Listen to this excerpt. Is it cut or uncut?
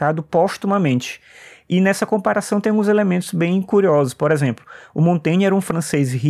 uncut